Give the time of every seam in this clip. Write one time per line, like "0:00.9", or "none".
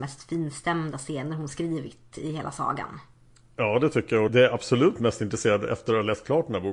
0:04.3

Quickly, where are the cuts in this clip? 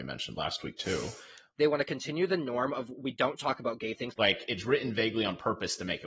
0:01.5
0:04.1

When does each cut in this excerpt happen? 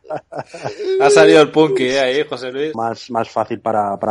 0:02.7

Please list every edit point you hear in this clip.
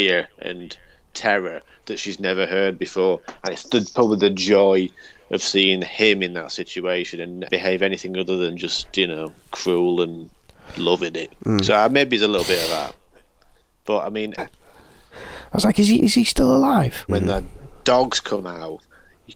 0:07.5
0:14.4
0:17.1

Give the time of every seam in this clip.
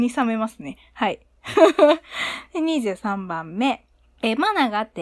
none

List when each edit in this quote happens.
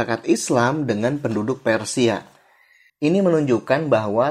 0:02.9

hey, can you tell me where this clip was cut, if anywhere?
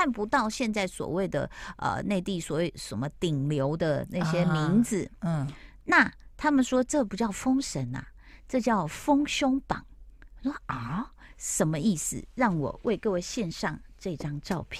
none

